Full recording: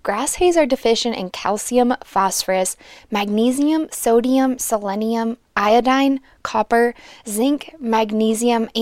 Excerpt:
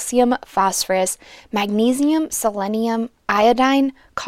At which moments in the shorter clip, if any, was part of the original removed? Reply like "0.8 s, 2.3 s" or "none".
2.3 s